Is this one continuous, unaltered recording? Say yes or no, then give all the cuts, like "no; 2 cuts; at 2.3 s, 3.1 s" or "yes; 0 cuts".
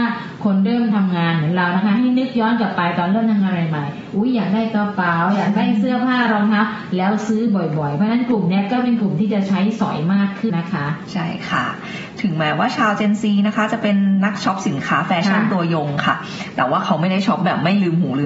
no; 1 cut; at 10.5 s